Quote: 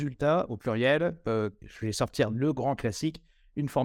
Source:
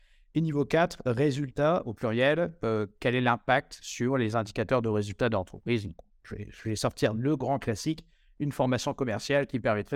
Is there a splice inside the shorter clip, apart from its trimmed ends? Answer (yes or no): yes